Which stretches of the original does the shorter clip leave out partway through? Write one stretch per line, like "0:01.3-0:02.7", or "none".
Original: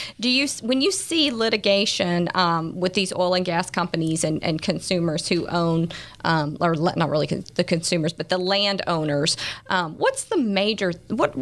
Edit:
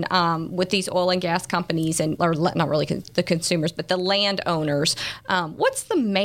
0:04.4-0:06.6

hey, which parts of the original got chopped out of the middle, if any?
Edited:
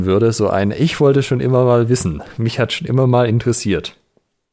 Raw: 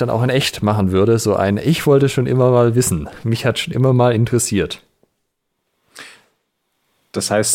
none

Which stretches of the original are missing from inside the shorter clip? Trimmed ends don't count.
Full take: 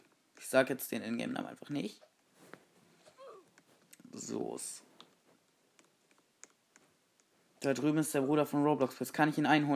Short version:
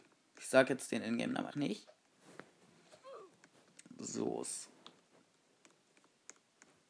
0:01.5-0:01.6

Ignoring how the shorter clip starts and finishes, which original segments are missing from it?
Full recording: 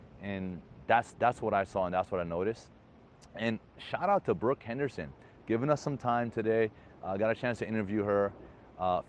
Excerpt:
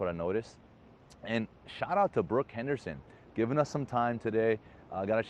none

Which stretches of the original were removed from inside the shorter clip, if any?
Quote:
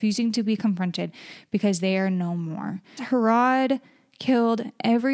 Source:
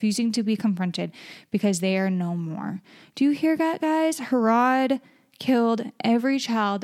0:03.0-0:04.2

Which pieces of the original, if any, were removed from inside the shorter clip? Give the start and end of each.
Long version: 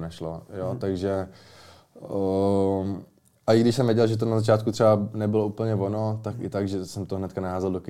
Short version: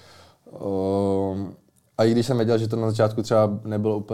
none

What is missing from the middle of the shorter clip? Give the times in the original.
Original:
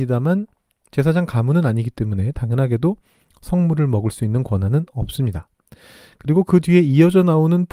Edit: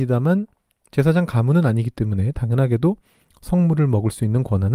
none

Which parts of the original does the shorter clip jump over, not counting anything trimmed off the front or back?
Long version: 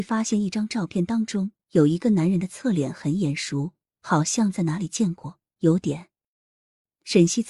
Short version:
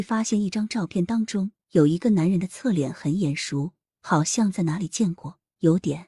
none

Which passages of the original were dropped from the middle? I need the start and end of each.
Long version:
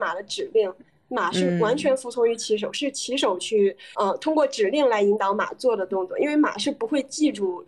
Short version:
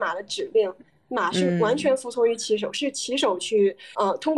none

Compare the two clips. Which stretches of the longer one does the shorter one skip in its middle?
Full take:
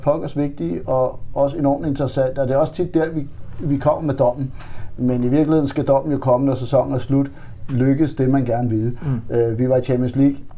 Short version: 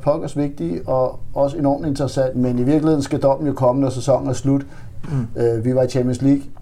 0:02.3-0:05.0
0:07.7-0:09.0

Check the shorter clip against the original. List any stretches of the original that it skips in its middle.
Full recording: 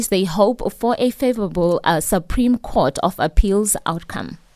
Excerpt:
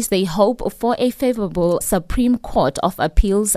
0:01.8-0:02.0

